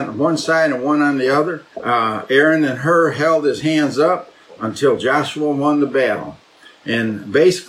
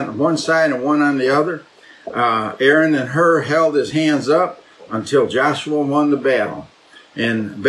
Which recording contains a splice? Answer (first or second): first